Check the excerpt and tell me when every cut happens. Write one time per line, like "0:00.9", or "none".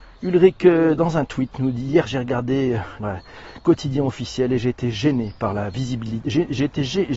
0:03.0